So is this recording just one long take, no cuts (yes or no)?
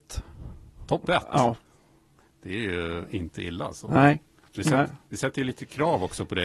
yes